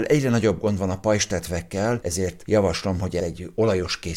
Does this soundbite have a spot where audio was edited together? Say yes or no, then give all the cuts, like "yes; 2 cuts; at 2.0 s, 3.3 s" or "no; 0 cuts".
no; 0 cuts